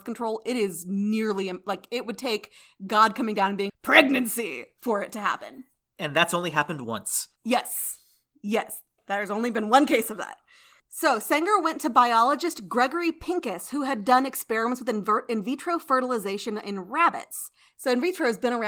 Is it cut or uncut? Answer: cut